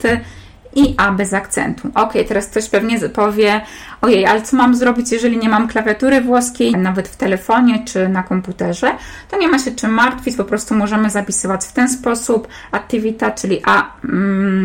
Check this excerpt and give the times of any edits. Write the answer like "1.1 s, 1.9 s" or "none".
6.7 s